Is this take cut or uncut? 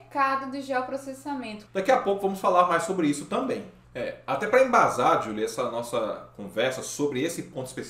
cut